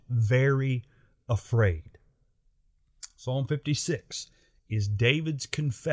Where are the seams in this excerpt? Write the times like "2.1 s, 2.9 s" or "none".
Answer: none